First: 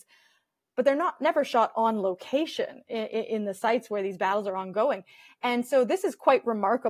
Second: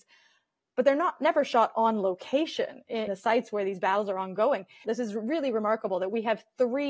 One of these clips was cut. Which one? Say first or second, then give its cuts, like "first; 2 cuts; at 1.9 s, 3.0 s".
second; 2 cuts; at 3.1 s, 4.8 s